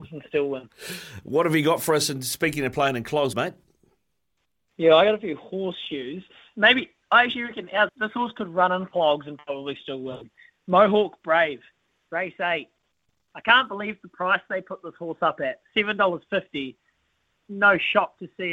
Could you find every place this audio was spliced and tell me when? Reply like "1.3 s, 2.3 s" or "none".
3.3 s, 7.9 s